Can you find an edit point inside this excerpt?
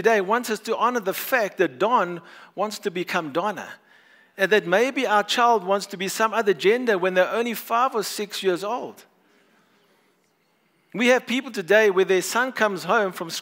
no; 0 cuts

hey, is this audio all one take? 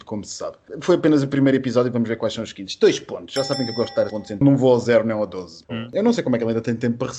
no; 2 cuts; at 4.1 s, 5.7 s

